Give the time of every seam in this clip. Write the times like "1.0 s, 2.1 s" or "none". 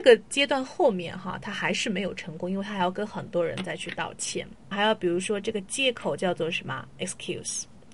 4.7 s